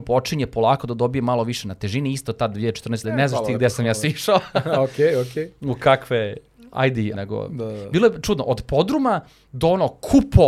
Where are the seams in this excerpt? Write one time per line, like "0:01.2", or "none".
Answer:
0:03.0
0:07.1